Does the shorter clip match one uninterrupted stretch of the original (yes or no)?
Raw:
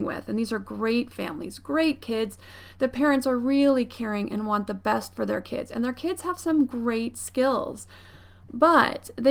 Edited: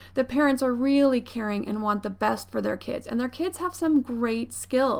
yes